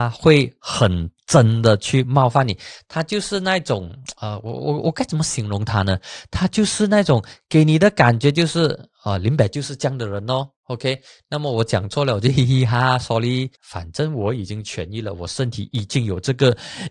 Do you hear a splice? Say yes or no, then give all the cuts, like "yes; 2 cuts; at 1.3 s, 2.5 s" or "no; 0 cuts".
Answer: yes; 1 cut; at 13.6 s